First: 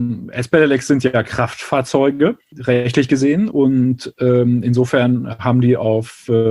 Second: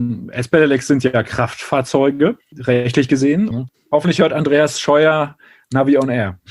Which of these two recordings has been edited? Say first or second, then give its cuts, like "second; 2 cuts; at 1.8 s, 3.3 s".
second; 1 cut; at 3.5 s